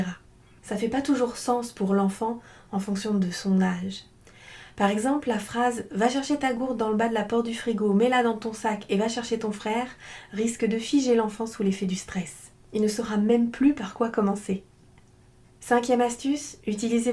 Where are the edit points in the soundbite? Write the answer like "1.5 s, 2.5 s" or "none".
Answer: none

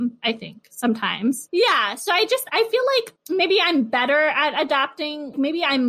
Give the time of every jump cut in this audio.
1.5 s, 2.5 s

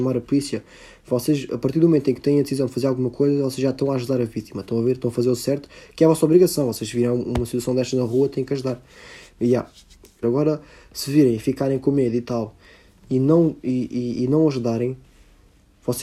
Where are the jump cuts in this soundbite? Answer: 10.2 s

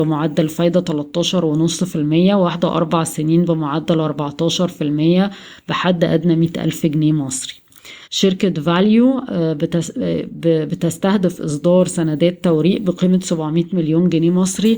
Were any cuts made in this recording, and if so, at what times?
8.0 s

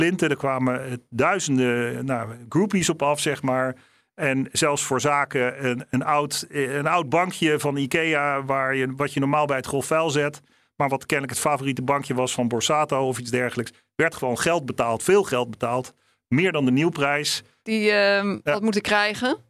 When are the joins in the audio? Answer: 17.7 s

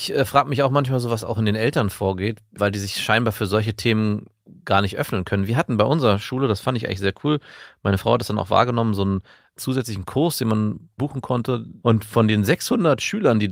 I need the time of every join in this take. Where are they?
11.8 s

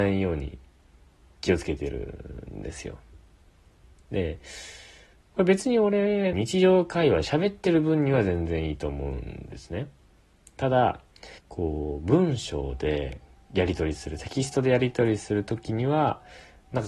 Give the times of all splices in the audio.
6.3 s, 11.4 s

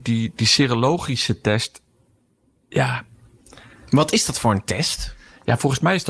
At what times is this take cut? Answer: none

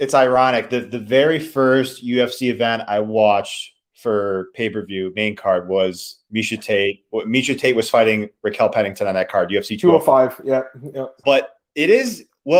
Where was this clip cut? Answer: 11.2 s

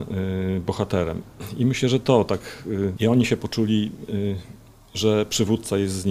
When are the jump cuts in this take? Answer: 3.0 s

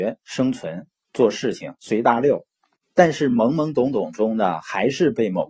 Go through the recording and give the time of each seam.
none

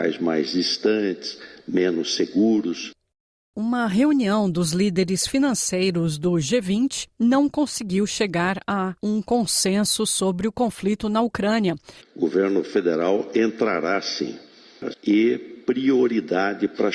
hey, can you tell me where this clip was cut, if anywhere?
12.0 s, 14.9 s

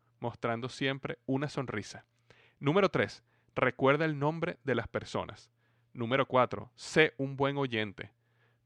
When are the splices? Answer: none

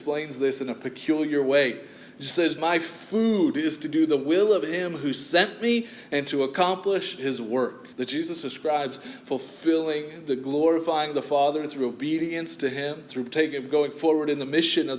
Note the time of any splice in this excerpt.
2.6 s, 7.9 s

